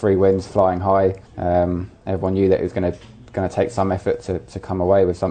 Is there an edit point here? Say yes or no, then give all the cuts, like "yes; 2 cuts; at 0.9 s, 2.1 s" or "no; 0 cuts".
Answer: yes; 1 cut; at 1.3 s